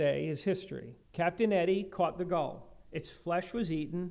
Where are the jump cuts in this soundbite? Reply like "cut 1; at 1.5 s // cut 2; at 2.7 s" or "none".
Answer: cut 1; at 1.0 s